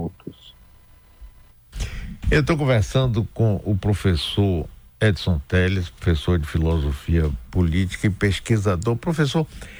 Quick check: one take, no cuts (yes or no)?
yes